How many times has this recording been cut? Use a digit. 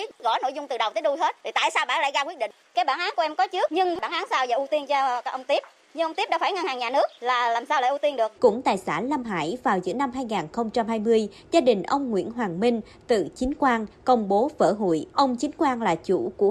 2